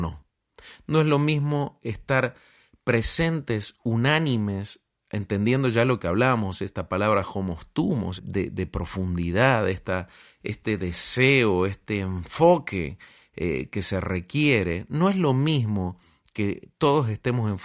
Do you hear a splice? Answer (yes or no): yes